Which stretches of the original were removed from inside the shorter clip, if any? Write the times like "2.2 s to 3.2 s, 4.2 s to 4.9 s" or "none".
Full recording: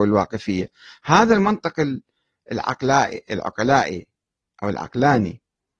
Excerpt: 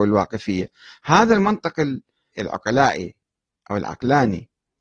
2.3 s to 3.2 s